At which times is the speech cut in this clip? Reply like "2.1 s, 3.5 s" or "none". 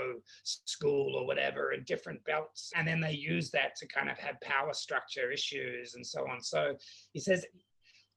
2.7 s